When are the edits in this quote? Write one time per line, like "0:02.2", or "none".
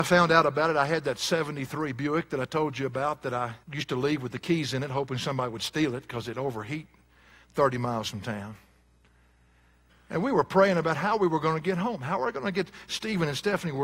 0:03.6